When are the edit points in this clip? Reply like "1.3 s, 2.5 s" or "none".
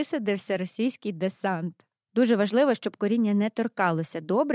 2.1 s

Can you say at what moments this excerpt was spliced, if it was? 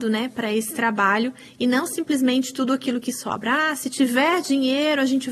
none

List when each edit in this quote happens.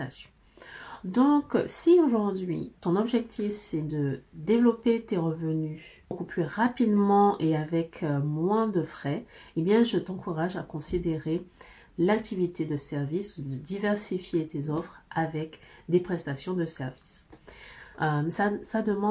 17.9 s

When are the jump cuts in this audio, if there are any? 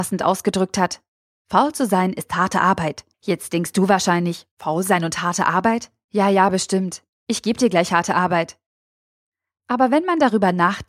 3.1 s

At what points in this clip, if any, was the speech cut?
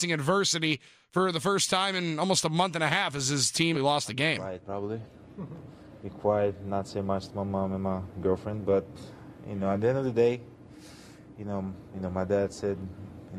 3.7 s

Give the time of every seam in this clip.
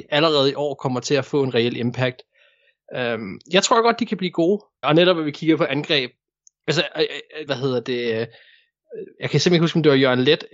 4.8 s, 7.5 s

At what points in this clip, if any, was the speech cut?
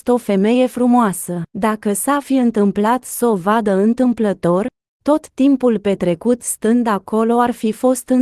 1.5 s

